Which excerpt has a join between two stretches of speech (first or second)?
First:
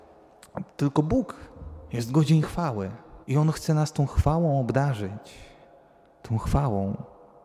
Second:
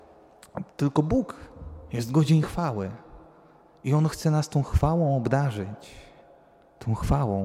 first